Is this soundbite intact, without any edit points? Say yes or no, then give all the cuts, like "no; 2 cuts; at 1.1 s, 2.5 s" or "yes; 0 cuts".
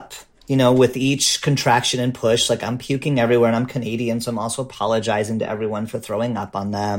yes; 0 cuts